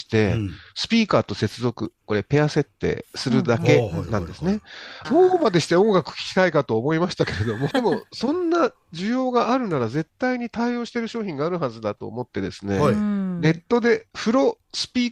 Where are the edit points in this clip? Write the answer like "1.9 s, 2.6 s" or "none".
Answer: 5.0 s, 7.7 s

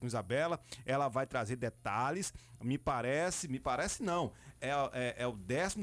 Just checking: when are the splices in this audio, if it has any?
4.6 s

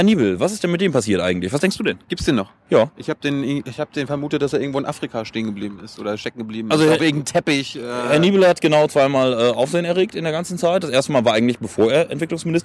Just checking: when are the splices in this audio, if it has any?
none

